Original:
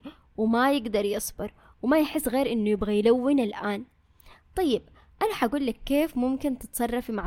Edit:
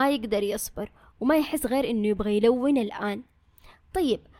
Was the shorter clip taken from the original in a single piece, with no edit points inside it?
yes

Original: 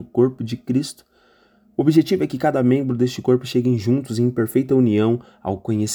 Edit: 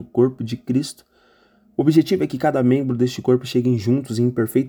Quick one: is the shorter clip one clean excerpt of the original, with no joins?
yes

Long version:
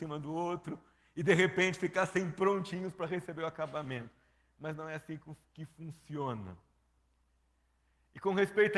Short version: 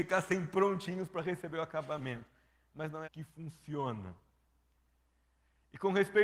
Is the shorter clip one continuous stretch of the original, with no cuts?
no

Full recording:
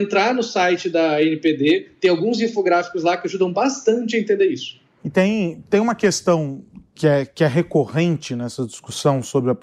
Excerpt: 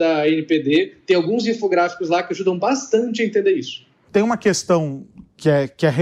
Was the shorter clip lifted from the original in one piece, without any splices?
no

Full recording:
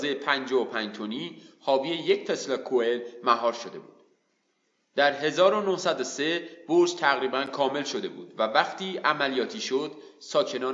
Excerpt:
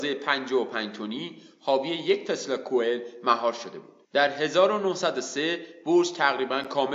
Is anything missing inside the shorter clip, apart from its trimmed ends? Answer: yes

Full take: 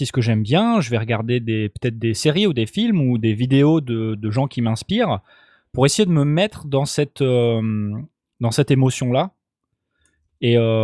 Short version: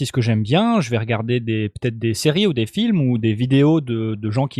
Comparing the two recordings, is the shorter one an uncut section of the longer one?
yes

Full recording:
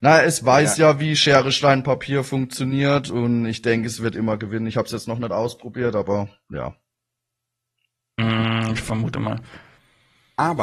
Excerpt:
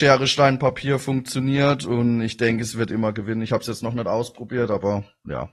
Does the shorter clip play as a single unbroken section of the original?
yes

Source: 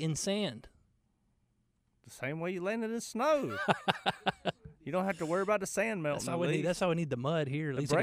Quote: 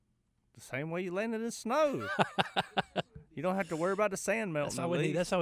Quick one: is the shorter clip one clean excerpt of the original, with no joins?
yes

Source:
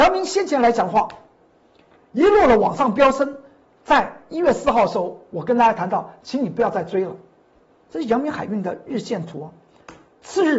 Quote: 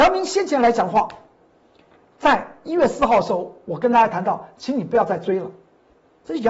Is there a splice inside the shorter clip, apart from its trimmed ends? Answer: yes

